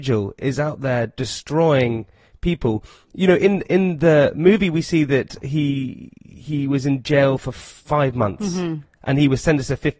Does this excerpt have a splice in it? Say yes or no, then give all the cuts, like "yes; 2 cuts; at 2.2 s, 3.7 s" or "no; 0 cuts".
no; 0 cuts